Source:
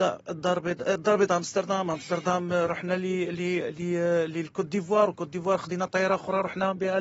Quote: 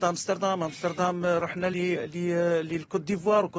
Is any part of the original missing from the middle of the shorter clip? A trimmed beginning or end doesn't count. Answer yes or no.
yes